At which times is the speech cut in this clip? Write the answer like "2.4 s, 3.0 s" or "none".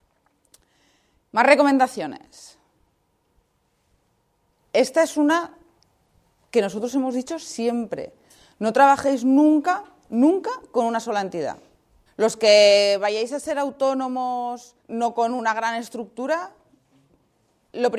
12.1 s, 14.8 s